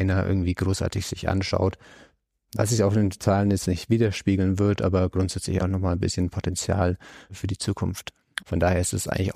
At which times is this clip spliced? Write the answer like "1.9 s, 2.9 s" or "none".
5.6 s, 8.4 s